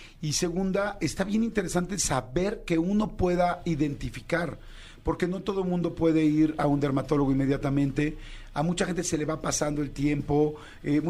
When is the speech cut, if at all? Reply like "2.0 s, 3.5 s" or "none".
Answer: none

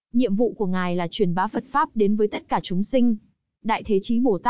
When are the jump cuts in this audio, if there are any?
3.6 s

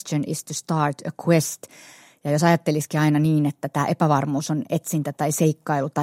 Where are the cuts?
none

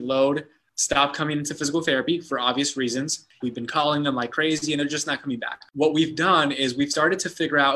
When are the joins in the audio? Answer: 3.4 s

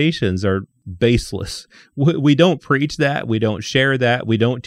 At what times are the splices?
none

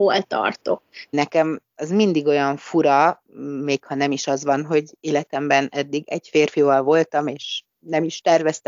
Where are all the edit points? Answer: 1.1 s

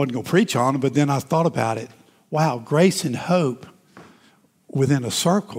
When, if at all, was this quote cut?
none

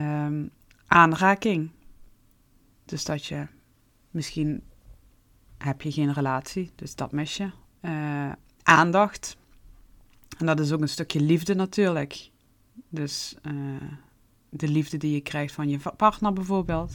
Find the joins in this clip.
7.7 s

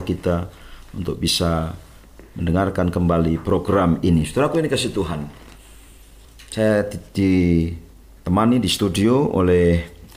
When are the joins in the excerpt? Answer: none

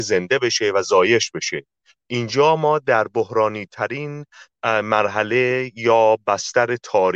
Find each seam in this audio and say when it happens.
none

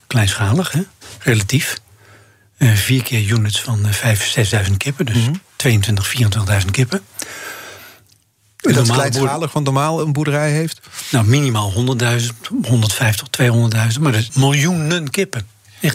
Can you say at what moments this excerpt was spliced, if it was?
14.3 s

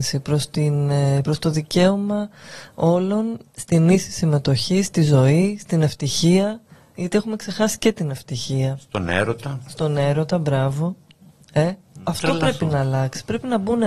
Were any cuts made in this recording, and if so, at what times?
3.4 s, 12.0 s

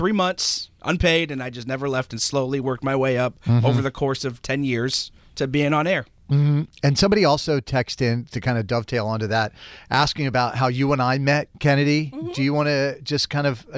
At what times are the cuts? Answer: none

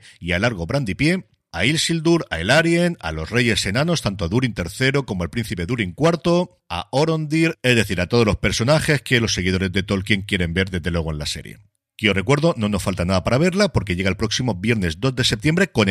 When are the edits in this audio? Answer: none

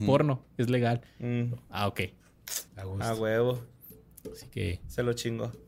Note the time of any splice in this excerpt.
2.7 s

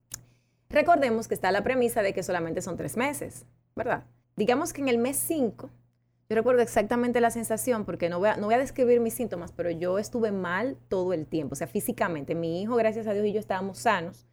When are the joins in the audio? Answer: 4.2 s

